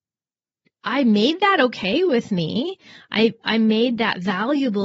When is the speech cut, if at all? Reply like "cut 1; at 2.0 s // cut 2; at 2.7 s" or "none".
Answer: none